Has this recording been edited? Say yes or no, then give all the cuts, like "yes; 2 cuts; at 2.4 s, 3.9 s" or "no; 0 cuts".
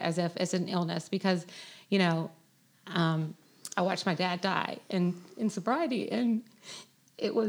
no; 0 cuts